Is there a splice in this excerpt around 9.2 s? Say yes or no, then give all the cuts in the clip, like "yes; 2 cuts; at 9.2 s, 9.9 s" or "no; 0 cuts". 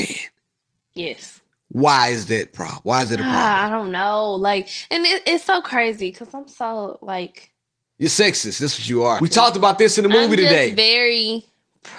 yes; 1 cut; at 9.2 s